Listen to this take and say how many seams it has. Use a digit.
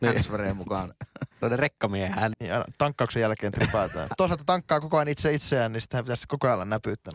3